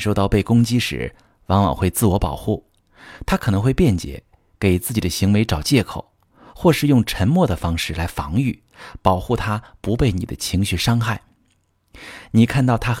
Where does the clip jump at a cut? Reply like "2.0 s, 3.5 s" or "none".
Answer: none

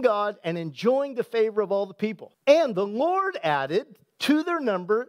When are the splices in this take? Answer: 2.3 s

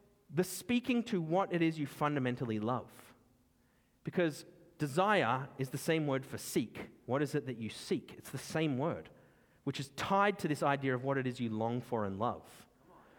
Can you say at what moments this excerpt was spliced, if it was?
none

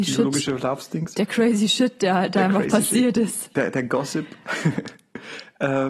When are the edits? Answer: none

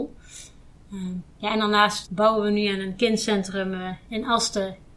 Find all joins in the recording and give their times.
2.0 s

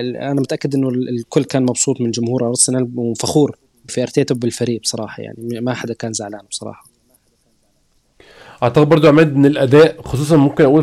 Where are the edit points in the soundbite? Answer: 3.9 s

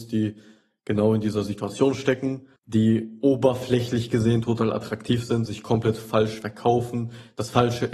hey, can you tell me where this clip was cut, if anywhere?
2.6 s, 5.5 s

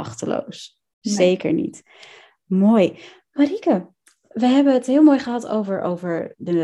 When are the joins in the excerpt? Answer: none

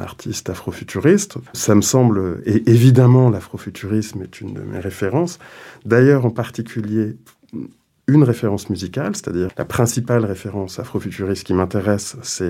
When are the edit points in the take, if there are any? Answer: 1.5 s, 9.5 s

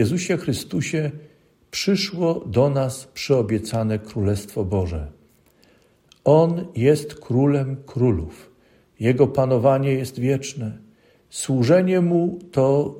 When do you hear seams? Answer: none

